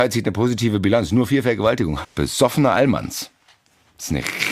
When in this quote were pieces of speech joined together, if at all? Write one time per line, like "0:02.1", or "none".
0:02.0